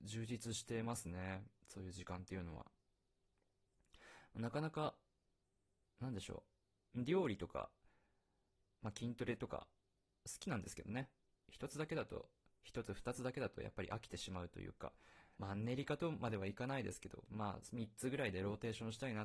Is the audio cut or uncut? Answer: cut